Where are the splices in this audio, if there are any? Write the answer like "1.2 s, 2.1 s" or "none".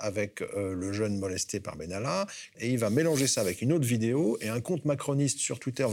2.5 s